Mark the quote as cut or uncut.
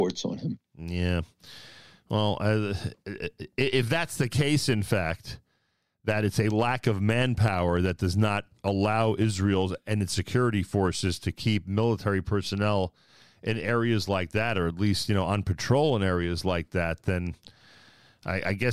uncut